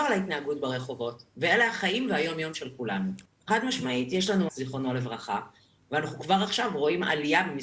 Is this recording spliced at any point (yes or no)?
yes